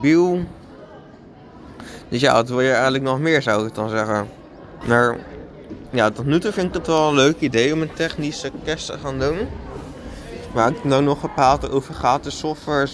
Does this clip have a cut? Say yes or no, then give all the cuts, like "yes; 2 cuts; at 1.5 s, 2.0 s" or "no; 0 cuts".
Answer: yes; 1 cut; at 4.8 s